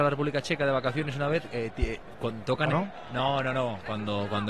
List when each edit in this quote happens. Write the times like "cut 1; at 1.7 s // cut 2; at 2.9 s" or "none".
cut 1; at 2.7 s

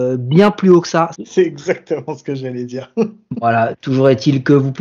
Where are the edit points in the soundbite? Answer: cut 1; at 1.1 s

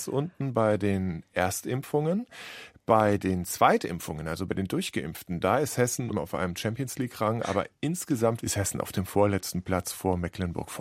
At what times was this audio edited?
cut 1; at 6.1 s // cut 2; at 8.4 s

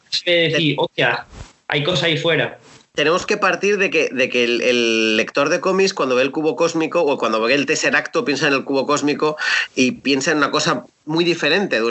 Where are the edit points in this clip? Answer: none

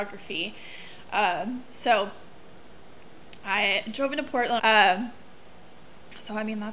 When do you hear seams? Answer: cut 1; at 4.6 s

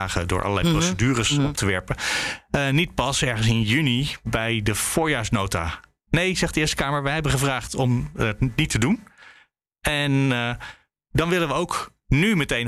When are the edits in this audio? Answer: none

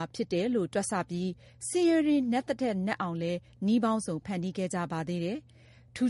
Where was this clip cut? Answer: none

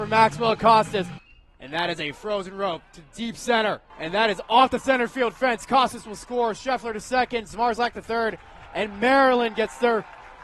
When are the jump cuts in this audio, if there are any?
cut 1; at 3.9 s

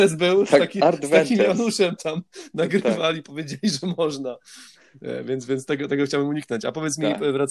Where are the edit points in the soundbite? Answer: none

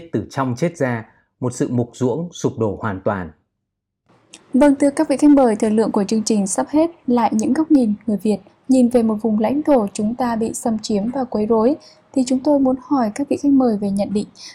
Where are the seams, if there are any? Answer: none

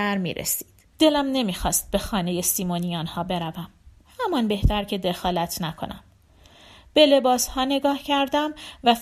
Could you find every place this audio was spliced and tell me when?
cut 1; at 0.9 s

